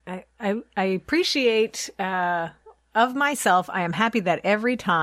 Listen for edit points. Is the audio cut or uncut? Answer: uncut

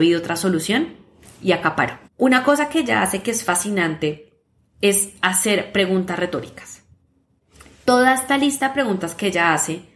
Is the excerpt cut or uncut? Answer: cut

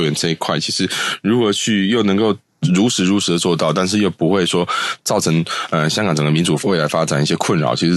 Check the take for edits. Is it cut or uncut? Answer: uncut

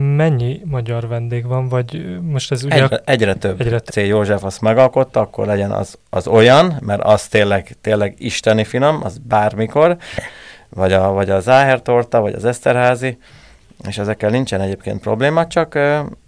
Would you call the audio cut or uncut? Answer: cut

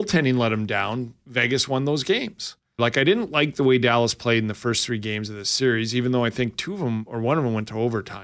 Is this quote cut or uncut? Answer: cut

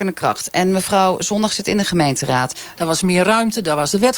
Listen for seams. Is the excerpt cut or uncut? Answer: cut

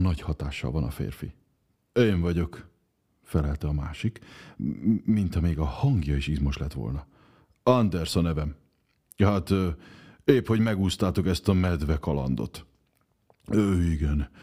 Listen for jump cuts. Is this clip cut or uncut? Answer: uncut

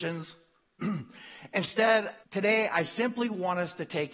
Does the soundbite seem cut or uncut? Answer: cut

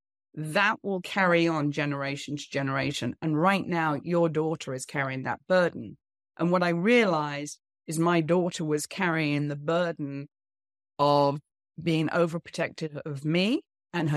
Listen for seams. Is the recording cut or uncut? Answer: uncut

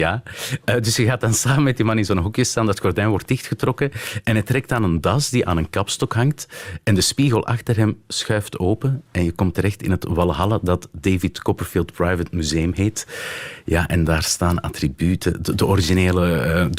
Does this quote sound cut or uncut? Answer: uncut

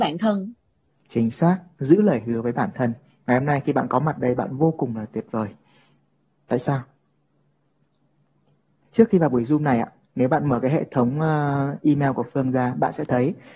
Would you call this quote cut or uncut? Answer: uncut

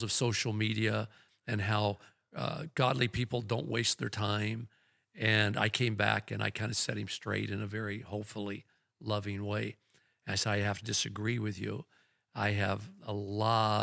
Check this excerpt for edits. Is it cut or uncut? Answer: uncut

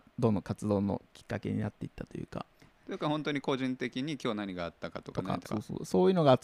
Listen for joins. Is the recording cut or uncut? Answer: cut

